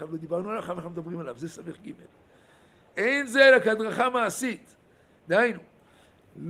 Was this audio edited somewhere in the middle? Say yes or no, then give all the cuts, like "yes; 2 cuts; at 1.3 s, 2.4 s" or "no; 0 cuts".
no; 0 cuts